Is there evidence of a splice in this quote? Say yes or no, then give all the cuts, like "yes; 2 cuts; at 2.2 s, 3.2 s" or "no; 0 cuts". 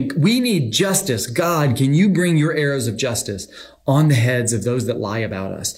no; 0 cuts